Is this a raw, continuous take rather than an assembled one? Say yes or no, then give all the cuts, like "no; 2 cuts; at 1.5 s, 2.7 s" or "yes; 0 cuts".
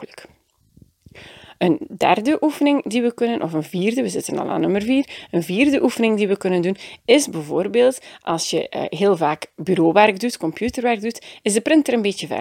yes; 0 cuts